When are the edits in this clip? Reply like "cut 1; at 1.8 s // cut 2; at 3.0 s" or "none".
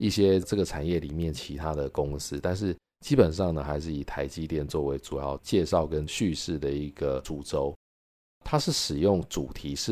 none